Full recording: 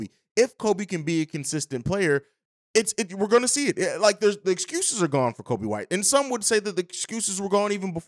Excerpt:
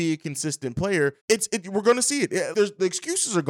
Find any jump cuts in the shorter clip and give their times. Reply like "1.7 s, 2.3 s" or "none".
1.2 s, 2.5 s